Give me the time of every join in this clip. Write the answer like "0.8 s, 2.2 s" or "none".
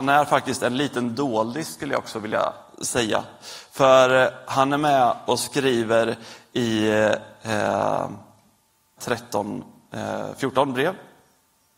9.0 s